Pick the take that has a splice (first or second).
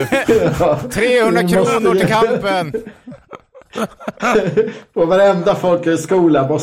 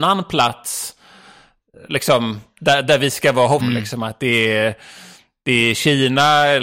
second